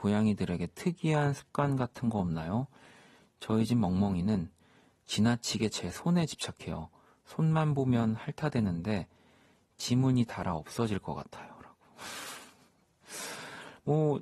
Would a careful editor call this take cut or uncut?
uncut